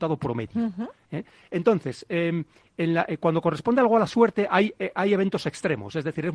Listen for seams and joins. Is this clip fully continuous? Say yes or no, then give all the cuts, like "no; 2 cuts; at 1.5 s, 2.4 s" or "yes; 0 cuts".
yes; 0 cuts